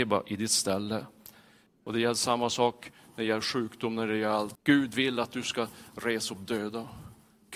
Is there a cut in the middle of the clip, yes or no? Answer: yes